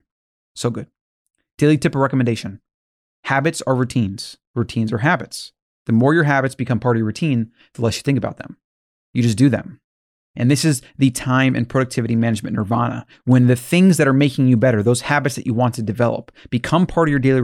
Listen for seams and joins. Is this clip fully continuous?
yes; 0 cuts

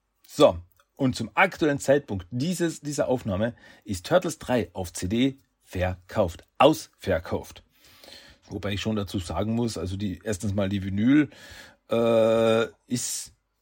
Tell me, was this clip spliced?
yes; 1 cut; at 8.4 s

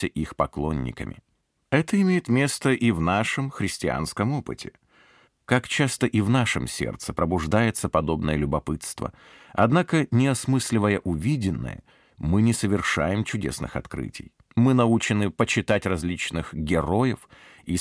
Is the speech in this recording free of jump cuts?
no; 2 cuts; at 5.3 s, 14.4 s

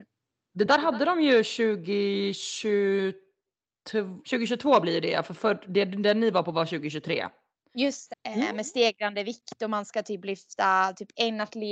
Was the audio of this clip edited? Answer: yes; 2 cuts; at 4.2 s, 8.1 s

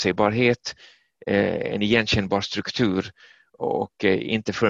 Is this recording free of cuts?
yes; 0 cuts

